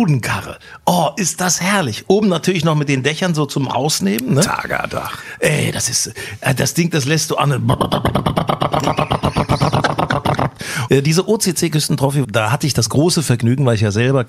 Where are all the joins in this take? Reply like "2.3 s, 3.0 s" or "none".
10.9 s, 12.2 s